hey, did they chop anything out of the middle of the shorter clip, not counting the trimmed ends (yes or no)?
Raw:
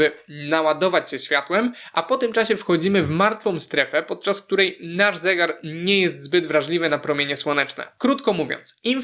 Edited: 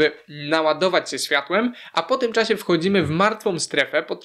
no